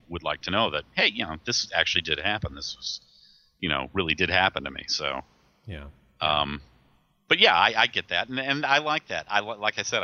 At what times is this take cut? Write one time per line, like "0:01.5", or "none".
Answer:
none

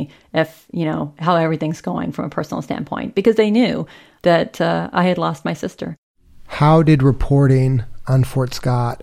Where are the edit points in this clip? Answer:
0:04.2

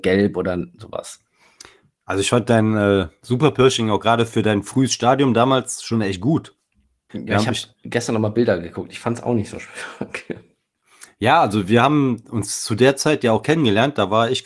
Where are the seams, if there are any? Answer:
0:07.1

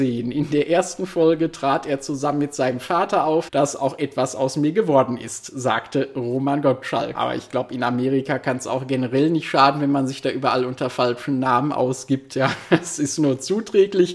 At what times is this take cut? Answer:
0:03.5
0:07.1

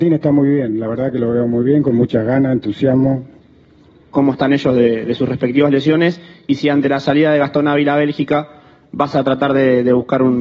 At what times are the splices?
0:04.1

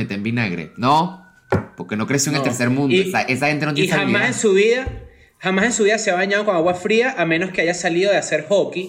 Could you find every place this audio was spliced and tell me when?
none

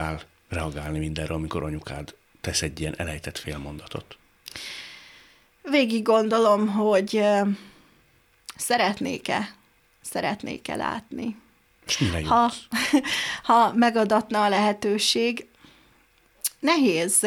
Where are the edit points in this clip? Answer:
none

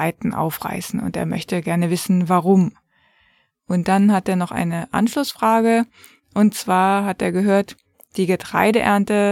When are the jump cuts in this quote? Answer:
none

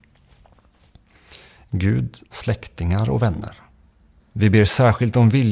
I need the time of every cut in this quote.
0:02.3
0:04.2

